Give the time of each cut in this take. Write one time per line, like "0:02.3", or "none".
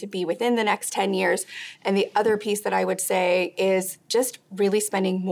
0:01.8